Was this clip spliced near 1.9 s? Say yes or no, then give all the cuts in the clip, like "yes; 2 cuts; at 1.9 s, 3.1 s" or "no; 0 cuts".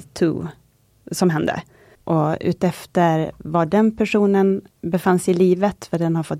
yes; 2 cuts; at 1.9 s, 4.7 s